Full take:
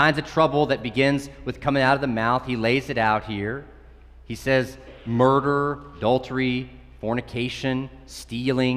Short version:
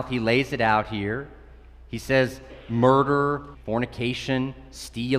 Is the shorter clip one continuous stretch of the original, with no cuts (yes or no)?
no